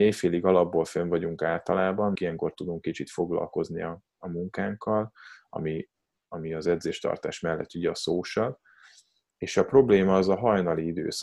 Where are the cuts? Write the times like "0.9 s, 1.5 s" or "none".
2.2 s